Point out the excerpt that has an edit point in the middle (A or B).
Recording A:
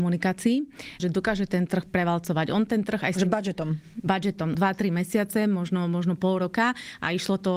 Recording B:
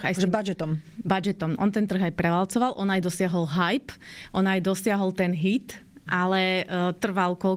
A